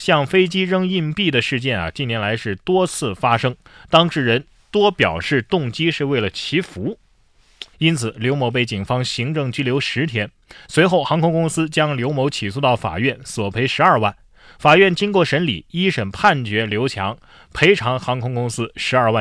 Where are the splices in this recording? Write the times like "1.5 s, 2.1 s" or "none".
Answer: 7.7 s